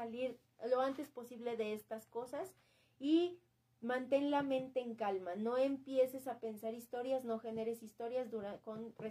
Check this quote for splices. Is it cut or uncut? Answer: uncut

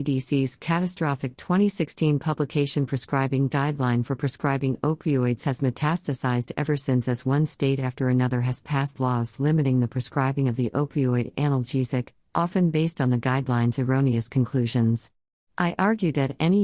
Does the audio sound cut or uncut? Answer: cut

